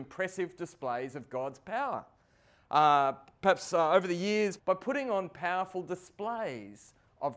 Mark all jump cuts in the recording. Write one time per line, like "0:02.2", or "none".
0:04.6